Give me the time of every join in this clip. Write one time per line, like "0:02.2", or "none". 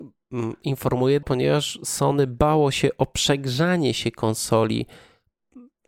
0:01.2